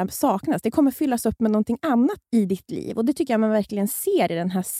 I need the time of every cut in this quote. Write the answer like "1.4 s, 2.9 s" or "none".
2.2 s